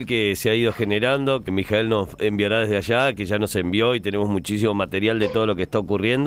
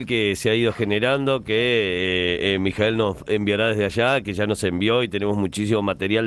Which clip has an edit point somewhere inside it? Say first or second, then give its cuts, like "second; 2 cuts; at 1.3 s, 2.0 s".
first; 1 cut; at 1.5 s